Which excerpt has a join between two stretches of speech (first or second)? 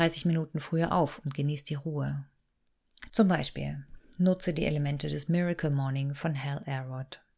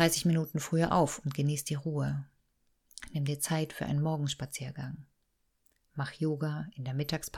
first